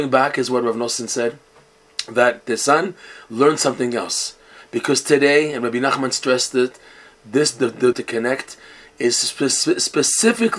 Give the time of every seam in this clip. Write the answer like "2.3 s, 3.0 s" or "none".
7.9 s